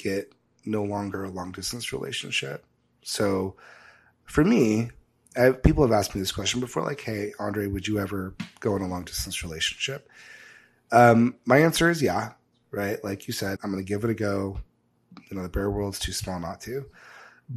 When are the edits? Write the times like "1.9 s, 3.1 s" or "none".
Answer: 13.6 s